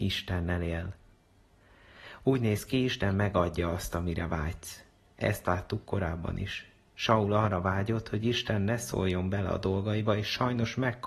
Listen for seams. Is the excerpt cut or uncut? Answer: uncut